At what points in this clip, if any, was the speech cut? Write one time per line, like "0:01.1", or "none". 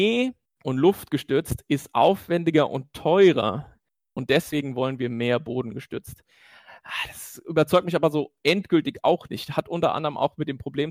none